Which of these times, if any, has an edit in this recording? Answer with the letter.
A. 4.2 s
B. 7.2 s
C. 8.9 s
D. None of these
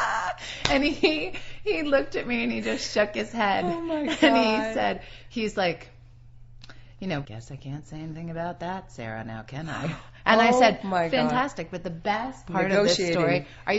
B